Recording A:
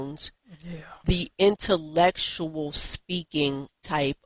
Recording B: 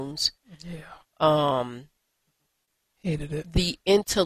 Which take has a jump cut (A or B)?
A